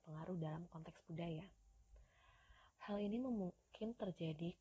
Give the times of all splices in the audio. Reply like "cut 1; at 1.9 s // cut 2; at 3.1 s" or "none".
cut 1; at 2.7 s